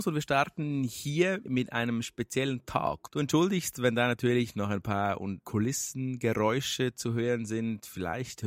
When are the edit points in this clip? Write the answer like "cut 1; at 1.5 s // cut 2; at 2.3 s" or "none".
cut 1; at 1.5 s // cut 2; at 3.1 s // cut 3; at 5.4 s